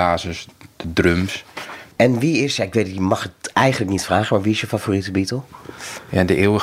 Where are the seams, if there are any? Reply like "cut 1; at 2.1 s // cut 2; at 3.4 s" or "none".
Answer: none